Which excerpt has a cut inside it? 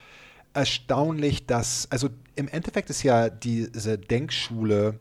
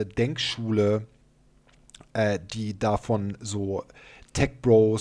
first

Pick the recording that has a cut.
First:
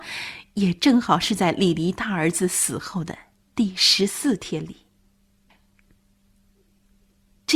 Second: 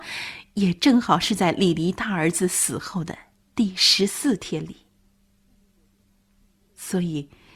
first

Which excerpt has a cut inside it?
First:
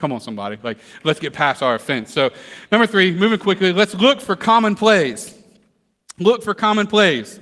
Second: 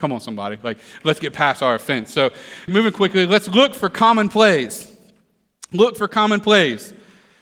second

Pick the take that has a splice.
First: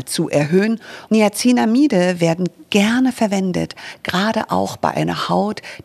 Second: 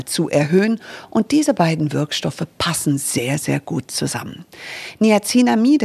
first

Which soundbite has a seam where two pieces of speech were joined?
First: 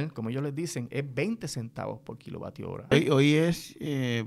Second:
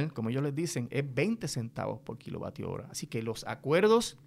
first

